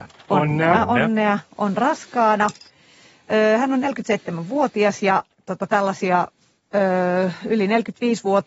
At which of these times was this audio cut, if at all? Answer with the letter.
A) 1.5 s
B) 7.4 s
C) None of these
C